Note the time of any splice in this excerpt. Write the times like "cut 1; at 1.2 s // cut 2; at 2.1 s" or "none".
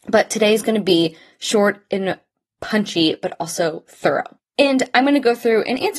cut 1; at 4.4 s